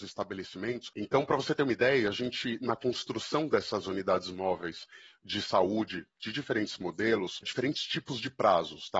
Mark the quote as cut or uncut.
cut